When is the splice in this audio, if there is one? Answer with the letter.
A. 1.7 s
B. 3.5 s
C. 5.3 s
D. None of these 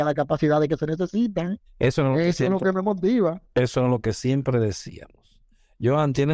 A